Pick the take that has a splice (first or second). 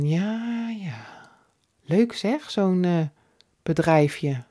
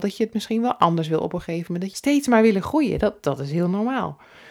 second